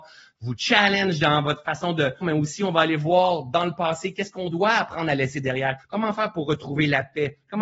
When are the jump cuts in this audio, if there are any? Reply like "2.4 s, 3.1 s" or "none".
2.2 s, 5.8 s